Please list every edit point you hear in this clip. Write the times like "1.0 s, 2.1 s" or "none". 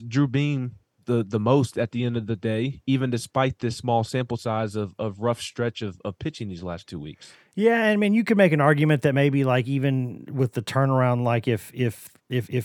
none